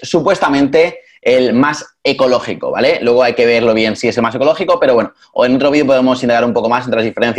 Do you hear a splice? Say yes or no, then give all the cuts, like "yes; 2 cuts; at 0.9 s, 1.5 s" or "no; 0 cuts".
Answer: no; 0 cuts